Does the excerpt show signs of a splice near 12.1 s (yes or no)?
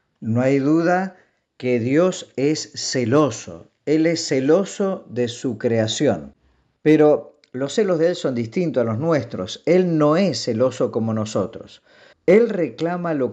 yes